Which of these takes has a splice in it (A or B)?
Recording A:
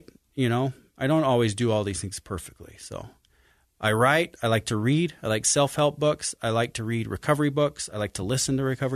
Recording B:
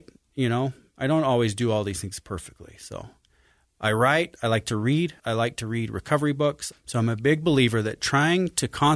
B